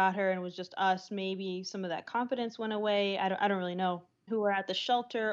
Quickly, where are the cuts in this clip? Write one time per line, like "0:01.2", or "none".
0:04.3

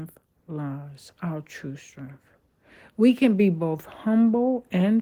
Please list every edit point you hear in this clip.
none

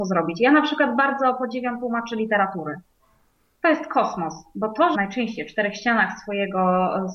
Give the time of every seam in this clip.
0:04.9

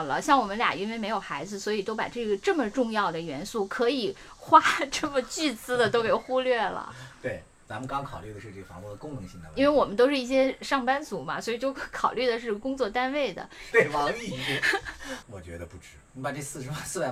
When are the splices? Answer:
0:13.7
0:15.2

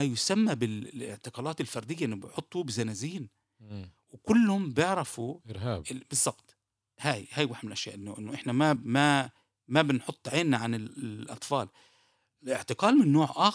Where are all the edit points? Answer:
none

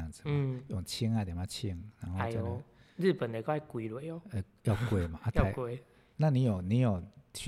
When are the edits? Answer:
none

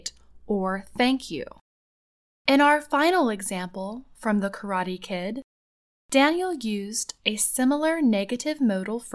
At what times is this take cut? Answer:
0:02.4

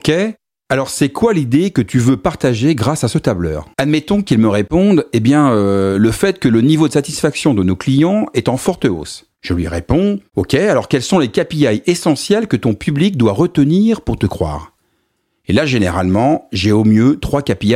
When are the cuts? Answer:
0:03.7

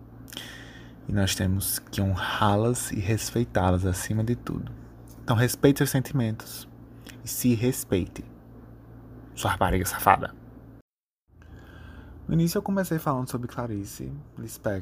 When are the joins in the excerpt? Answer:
none

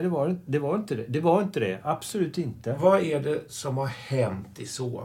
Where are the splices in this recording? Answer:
none

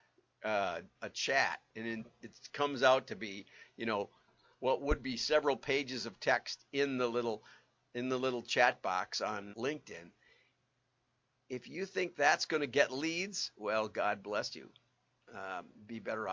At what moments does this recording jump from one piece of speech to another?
0:00.9
0:09.5

